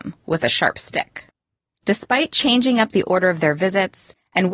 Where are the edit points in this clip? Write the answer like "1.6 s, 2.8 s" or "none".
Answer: 1.8 s